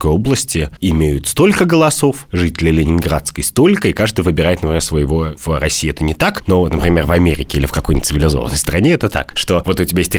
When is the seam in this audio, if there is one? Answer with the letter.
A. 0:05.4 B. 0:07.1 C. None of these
A